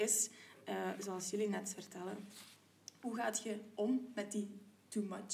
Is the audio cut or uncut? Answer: uncut